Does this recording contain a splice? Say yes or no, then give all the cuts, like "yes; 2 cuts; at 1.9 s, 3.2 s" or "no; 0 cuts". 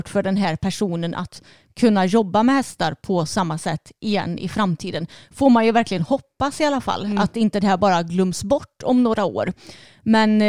no; 0 cuts